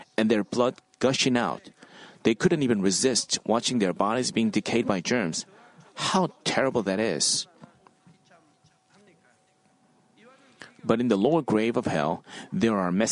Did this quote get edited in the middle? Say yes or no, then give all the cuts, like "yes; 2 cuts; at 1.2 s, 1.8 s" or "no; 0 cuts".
no; 0 cuts